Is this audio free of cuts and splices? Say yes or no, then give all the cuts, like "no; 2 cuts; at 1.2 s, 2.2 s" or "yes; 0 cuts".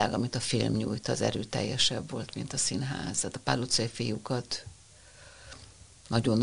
yes; 0 cuts